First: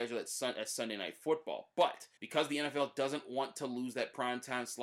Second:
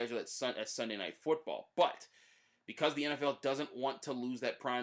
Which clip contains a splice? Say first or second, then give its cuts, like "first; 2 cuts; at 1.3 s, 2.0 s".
first; 1 cut; at 2.2 s